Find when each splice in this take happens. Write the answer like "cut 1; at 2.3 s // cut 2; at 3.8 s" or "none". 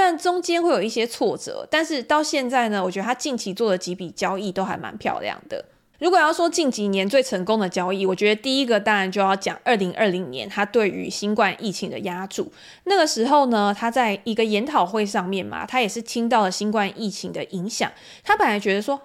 none